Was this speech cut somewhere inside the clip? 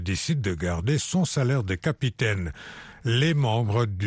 no; 0 cuts

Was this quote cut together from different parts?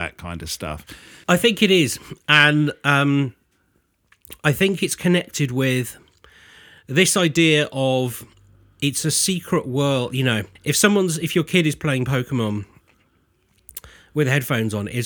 yes; 2 cuts; at 1.2 s, 10.6 s

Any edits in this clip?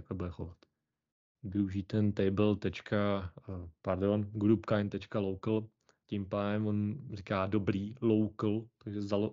yes; 1 cut; at 1.3 s

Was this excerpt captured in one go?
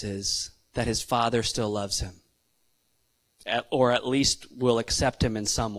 yes; 0 cuts

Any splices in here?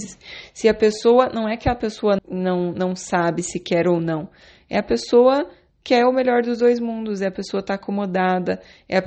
yes; 1 cut; at 2.2 s

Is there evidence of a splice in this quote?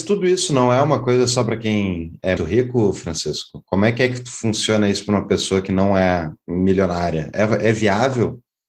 yes; 1 cut; at 2.4 s

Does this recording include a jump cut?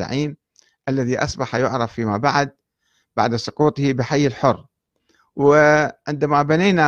no; 0 cuts

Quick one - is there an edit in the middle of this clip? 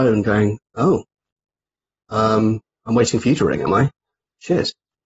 no; 0 cuts

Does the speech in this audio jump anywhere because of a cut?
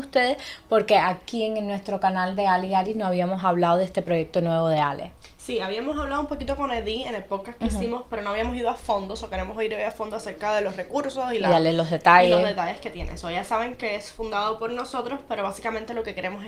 no; 0 cuts

